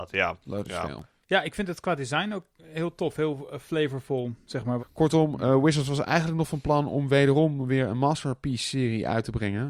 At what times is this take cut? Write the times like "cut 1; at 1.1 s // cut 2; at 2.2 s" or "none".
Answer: cut 1; at 1.2 s // cut 2; at 4.8 s